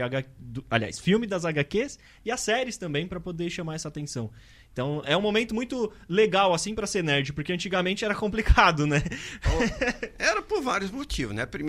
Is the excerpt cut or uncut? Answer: uncut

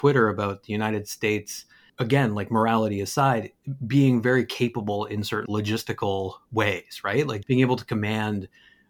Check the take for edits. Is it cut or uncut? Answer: cut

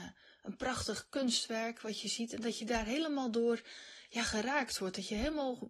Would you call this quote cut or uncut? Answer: uncut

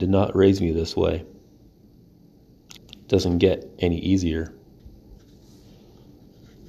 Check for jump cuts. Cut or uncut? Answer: cut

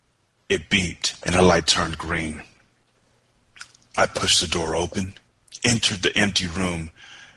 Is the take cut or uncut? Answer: cut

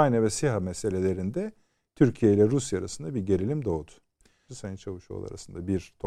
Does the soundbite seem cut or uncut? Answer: cut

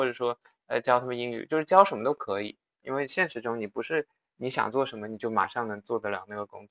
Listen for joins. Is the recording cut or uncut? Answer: cut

